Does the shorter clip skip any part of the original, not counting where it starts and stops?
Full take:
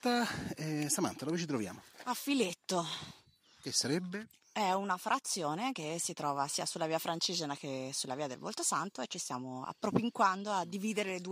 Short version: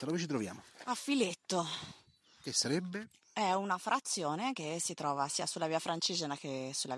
no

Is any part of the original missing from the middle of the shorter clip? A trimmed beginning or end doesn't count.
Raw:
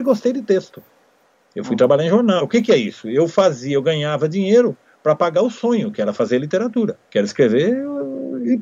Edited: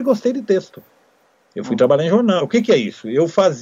no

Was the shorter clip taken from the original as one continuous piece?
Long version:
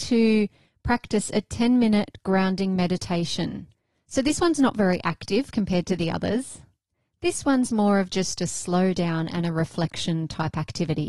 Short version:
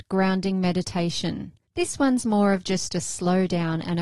no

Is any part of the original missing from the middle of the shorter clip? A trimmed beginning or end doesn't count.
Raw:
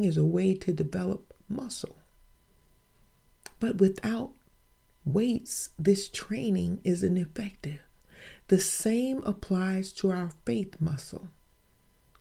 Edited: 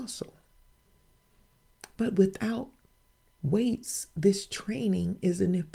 no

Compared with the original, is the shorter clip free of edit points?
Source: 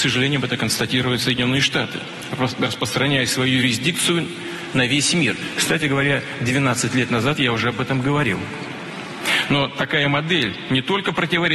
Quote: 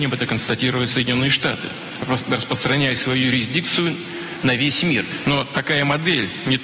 no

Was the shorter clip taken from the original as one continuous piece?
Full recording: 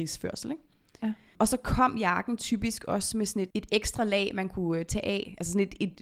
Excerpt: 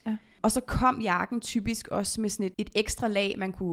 yes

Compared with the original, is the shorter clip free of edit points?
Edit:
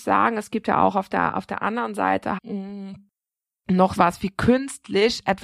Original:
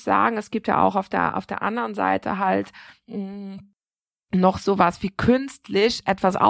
no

